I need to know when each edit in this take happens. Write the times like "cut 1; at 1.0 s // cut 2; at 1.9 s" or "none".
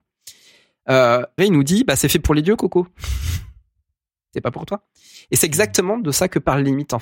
cut 1; at 1.4 s

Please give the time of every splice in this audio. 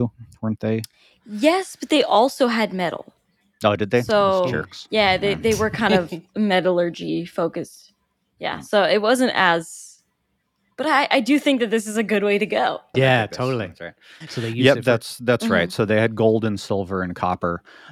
cut 1; at 12.9 s // cut 2; at 14.3 s

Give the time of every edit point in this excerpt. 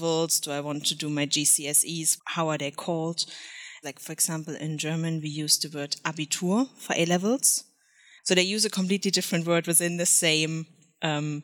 cut 1; at 2.2 s // cut 2; at 3.8 s // cut 3; at 8.2 s

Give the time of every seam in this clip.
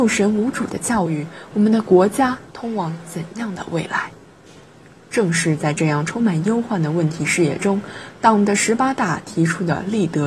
cut 1; at 1.5 s

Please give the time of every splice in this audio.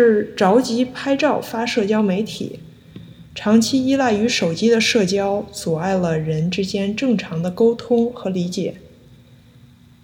cut 1; at 3.3 s

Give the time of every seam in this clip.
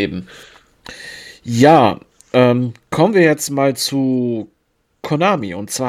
none

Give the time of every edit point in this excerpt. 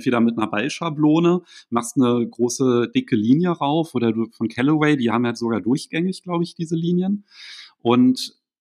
none

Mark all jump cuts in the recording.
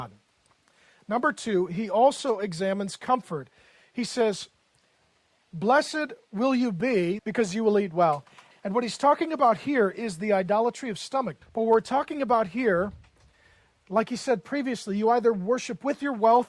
cut 1; at 7.2 s // cut 2; at 8.5 s // cut 3; at 11.4 s

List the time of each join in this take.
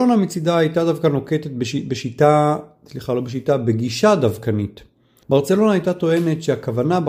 cut 1; at 5.2 s

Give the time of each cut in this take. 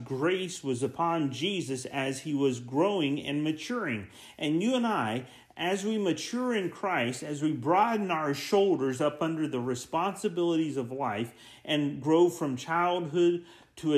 none

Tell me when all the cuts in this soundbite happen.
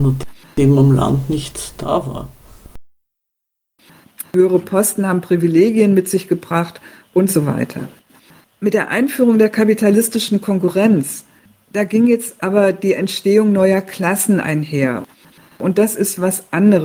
cut 1; at 4.2 s

